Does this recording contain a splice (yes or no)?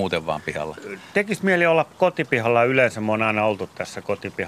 no